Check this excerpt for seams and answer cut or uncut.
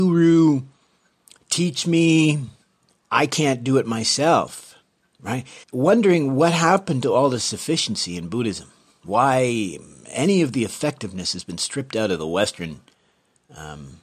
cut